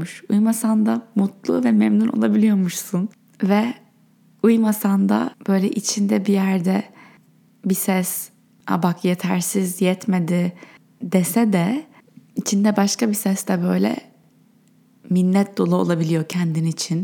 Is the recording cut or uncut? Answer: uncut